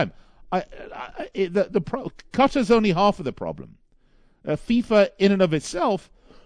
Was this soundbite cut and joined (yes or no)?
no